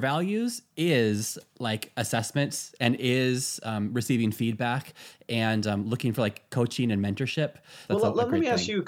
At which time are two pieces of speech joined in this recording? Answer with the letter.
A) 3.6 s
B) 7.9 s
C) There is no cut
B